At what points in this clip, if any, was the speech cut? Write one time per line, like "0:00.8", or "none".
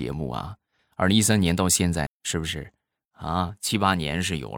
0:02.1